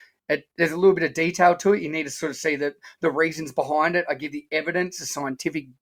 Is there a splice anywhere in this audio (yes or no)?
no